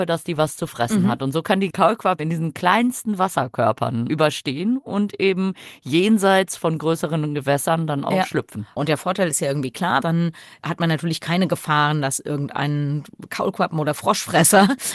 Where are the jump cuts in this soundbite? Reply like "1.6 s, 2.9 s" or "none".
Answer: 2.2 s, 10.0 s